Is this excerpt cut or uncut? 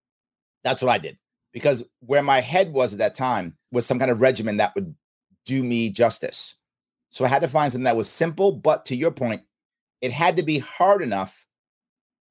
cut